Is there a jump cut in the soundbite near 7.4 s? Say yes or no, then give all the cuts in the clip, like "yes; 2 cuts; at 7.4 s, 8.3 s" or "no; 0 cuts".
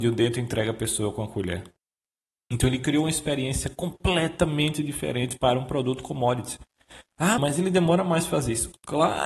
yes; 1 cut; at 7.4 s